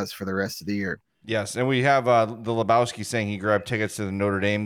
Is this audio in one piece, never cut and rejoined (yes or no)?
yes